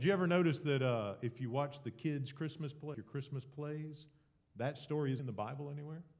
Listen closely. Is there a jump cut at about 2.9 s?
yes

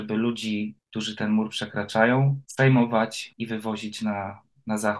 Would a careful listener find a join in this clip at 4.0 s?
no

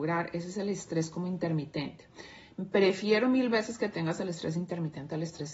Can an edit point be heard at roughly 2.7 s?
no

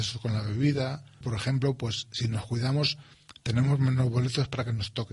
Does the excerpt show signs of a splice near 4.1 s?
no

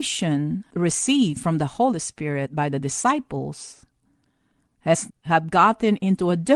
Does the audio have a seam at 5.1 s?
yes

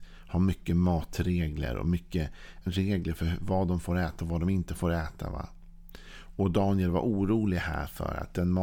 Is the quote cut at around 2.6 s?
yes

